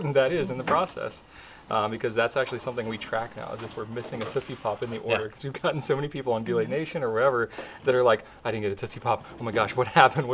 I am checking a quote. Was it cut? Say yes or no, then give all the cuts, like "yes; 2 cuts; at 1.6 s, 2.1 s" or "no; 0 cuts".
no; 0 cuts